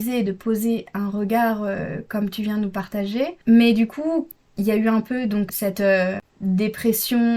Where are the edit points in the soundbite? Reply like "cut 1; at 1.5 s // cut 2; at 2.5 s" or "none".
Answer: cut 1; at 3.4 s // cut 2; at 6.3 s

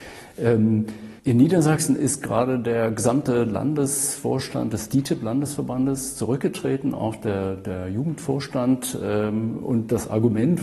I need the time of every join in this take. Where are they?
cut 1; at 1.2 s

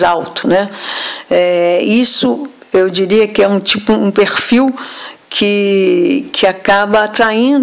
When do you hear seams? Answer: none

